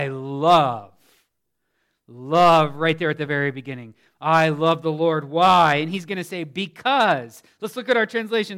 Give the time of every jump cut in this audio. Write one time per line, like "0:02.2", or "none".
none